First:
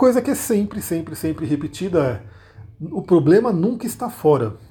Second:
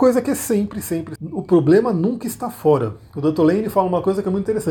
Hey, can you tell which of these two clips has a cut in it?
second; 1 cut; at 1.2 s

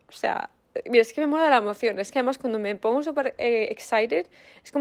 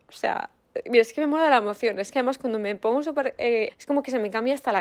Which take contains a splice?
second; 1 cut; at 3.7 s

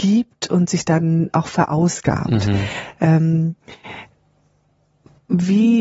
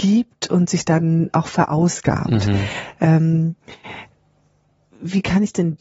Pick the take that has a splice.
second; 1 cut; at 4.9 s

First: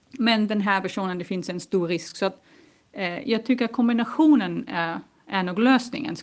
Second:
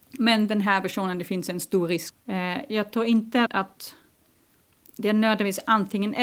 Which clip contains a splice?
second; 2 cuts; at 2.1 s, 3.5 s

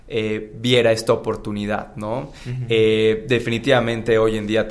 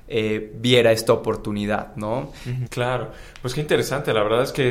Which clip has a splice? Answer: second; 1 cut; at 2.7 s

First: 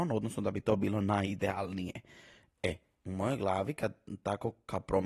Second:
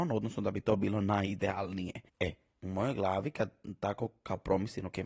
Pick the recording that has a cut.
second; 1 cut; at 2.1 s

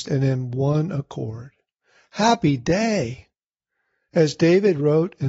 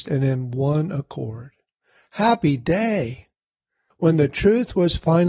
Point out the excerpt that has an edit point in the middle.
second; 1 cut; at 3.9 s

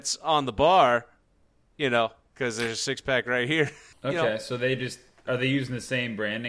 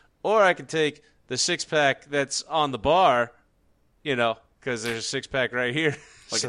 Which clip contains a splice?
first; 1 cut; at 3.9 s

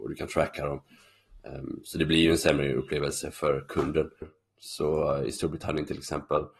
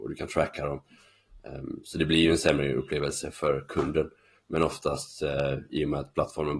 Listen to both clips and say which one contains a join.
first; 1 cut; at 4.2 s

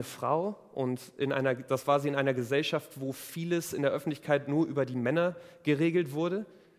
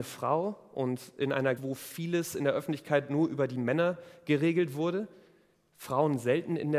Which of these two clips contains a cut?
second; 1 cut; at 1.6 s

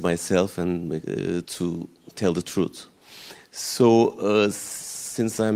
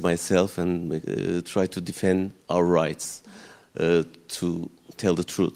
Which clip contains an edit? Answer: first; 1 cut; at 1.4 s

